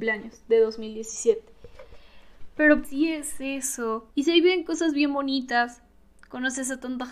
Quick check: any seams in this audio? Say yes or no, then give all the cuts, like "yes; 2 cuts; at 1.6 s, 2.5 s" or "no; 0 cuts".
yes; 2 cuts; at 2.8 s, 4.1 s